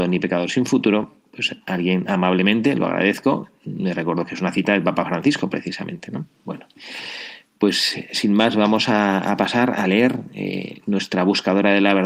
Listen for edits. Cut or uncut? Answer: uncut